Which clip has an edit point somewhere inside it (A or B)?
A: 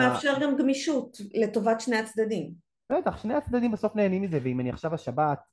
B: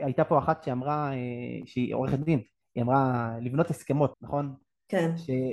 B